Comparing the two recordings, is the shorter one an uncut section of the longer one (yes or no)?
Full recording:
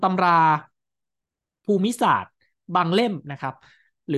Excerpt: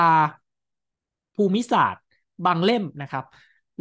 yes